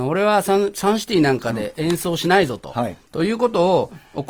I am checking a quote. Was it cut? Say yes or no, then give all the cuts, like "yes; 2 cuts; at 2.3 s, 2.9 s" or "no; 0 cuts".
no; 0 cuts